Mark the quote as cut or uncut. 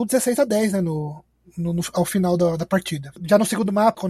uncut